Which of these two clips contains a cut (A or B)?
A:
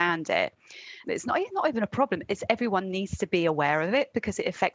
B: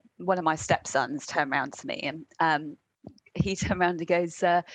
A